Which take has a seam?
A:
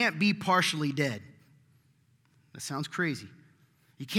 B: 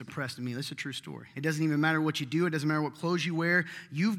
B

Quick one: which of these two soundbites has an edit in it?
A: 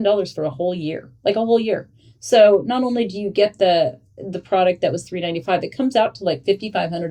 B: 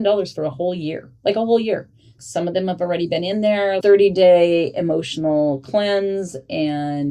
B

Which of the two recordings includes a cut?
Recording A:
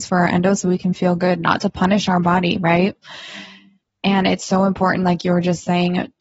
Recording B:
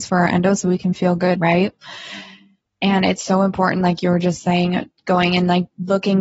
B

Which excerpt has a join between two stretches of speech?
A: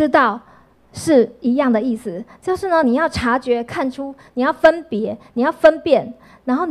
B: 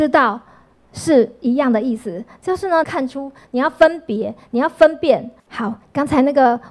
B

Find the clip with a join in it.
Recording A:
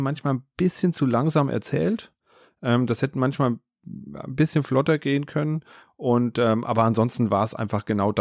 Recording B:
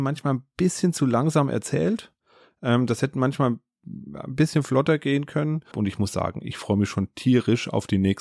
B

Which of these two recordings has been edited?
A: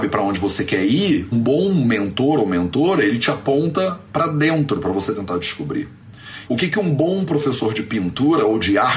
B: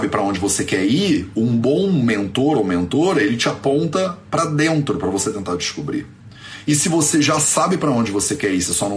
A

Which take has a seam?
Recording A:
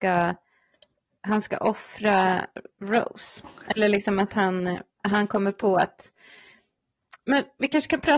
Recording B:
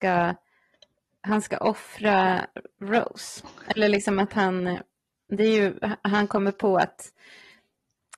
A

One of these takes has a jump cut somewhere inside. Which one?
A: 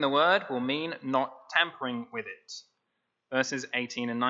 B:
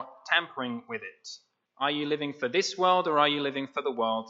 B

